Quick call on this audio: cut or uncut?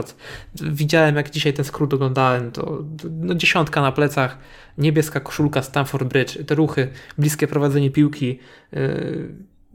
uncut